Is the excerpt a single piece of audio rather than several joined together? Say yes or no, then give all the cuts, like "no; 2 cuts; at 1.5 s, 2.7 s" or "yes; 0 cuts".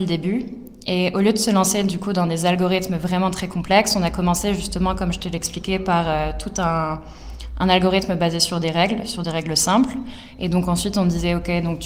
no; 1 cut; at 10.4 s